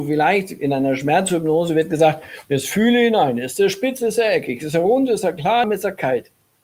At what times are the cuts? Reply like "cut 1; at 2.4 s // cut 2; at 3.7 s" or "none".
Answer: cut 1; at 5.6 s